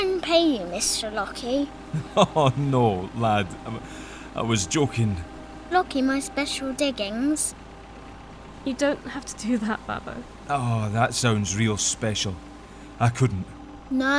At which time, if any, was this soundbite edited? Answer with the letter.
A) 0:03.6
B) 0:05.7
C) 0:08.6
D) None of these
B